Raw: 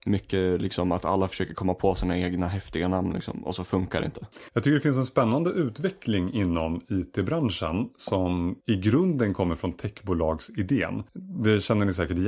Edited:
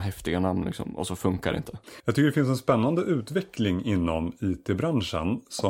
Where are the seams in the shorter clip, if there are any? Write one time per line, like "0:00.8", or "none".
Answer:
none